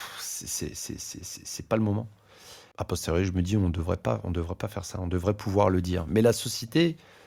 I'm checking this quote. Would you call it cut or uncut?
cut